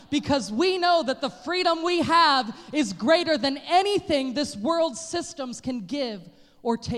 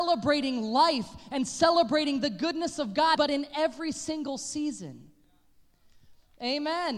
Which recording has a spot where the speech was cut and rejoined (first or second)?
second